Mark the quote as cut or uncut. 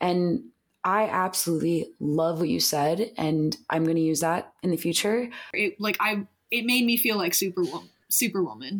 cut